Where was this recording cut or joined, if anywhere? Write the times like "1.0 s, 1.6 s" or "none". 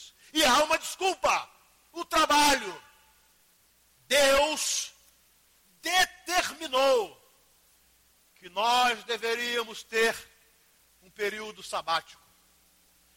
none